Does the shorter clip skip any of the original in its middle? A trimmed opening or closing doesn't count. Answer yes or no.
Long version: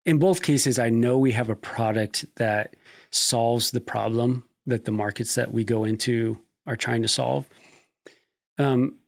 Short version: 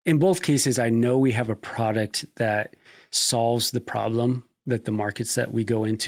no